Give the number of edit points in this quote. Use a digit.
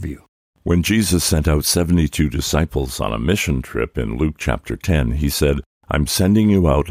0